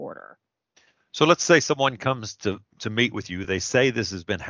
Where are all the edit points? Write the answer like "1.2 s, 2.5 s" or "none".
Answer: none